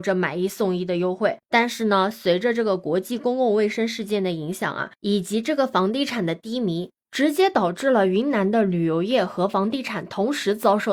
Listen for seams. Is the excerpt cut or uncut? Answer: cut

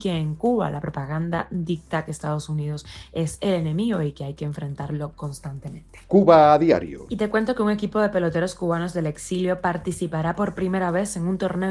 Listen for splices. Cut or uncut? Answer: uncut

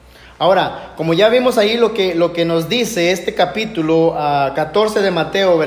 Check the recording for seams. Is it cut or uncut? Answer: uncut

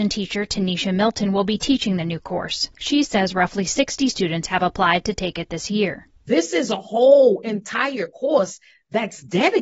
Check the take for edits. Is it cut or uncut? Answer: uncut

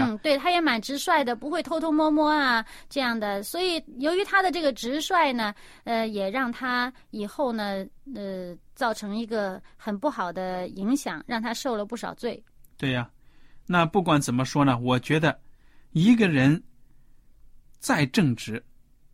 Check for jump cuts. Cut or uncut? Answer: uncut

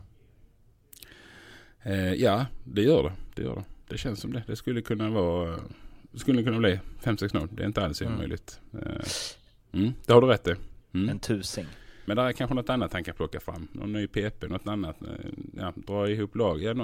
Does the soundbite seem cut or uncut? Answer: cut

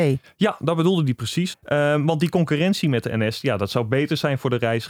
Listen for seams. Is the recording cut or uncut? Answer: cut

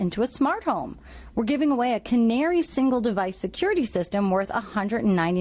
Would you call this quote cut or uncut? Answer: uncut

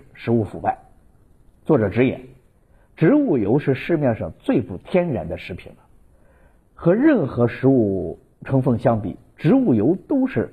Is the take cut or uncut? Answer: uncut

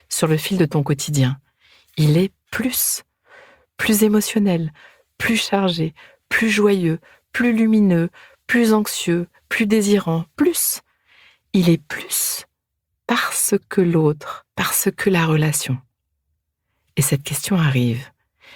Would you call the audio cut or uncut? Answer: cut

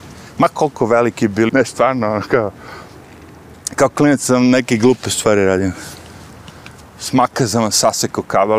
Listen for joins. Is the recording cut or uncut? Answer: cut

